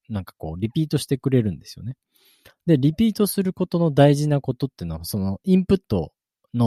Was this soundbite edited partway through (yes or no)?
no